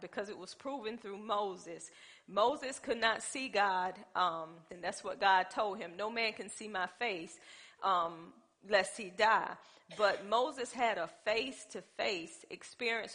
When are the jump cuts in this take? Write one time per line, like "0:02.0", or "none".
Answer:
0:04.7